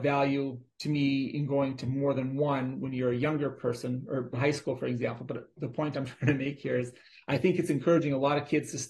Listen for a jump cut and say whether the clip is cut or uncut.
cut